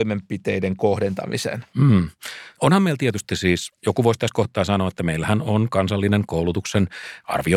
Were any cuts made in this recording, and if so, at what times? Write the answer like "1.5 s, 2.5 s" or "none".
2.6 s